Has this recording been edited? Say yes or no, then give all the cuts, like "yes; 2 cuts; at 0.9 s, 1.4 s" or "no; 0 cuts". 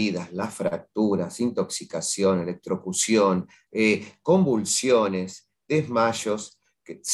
yes; 1 cut; at 3.7 s